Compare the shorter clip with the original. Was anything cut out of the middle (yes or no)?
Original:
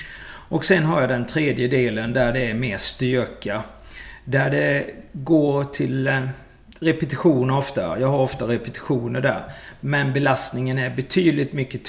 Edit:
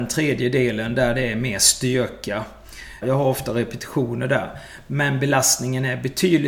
yes